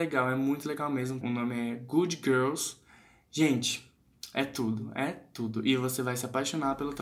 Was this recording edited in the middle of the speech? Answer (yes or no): yes